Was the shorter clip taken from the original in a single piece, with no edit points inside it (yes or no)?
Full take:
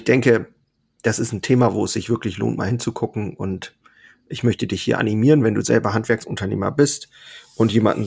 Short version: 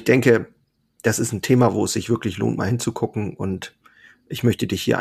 yes